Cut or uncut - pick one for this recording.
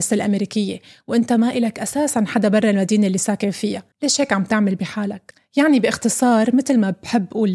cut